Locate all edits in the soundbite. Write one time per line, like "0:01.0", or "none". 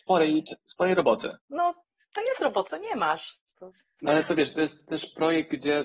0:01.4
0:02.7
0:04.0